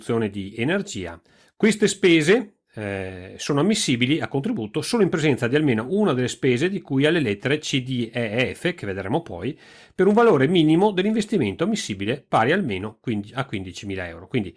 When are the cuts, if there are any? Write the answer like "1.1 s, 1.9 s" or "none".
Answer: none